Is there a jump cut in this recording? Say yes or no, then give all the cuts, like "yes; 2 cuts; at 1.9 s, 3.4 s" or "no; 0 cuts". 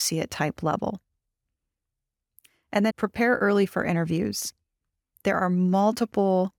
yes; 2 cuts; at 2.9 s, 5.1 s